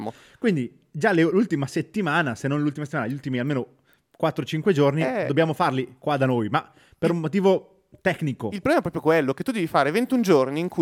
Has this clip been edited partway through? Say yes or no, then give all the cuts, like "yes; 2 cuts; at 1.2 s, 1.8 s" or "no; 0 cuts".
no; 0 cuts